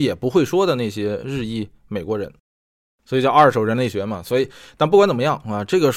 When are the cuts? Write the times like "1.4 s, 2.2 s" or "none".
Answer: none